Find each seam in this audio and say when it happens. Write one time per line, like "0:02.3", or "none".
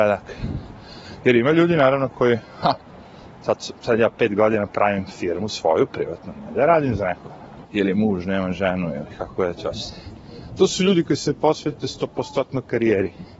0:07.6